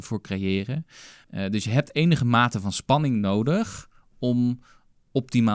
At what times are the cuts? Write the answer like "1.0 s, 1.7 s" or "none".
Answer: 1.2 s